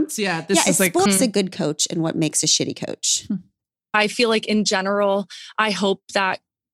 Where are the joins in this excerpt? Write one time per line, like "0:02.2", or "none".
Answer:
0:01.1